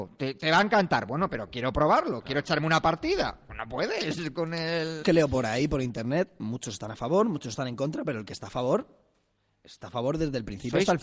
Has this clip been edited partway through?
yes; 1 cut; at 5.0 s

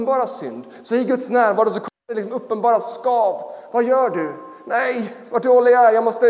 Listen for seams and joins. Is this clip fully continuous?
yes; 0 cuts

